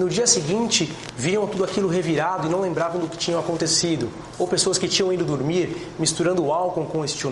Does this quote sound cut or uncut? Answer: uncut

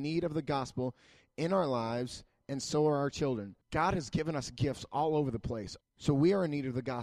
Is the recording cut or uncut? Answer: cut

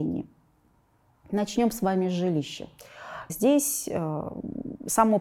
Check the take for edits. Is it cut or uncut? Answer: cut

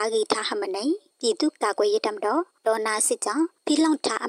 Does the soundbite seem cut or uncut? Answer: uncut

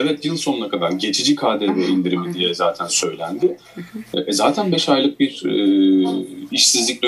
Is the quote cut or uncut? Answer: uncut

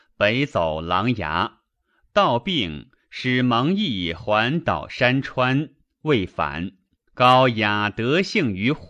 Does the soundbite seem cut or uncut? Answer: cut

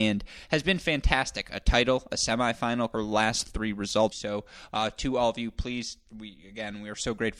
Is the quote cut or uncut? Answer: cut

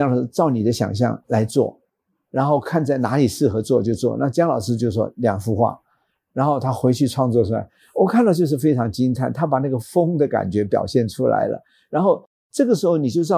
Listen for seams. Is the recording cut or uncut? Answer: uncut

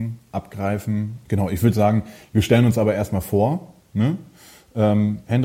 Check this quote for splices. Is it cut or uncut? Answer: cut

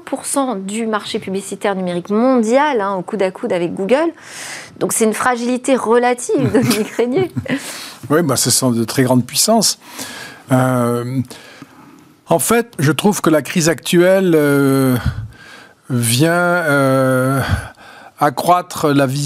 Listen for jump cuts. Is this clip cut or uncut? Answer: cut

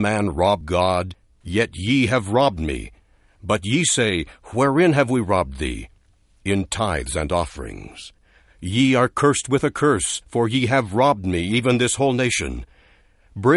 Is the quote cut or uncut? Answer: uncut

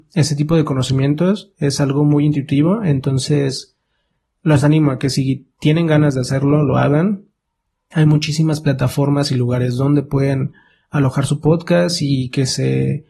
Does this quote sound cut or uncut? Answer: uncut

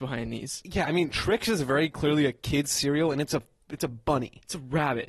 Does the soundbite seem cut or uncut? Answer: uncut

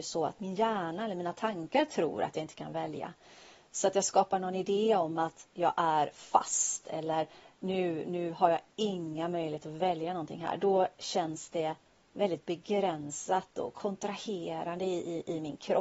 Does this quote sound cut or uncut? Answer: uncut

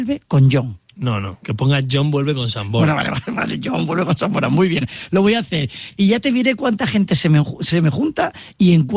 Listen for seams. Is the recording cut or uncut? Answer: uncut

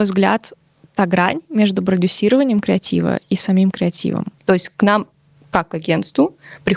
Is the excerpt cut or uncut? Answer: cut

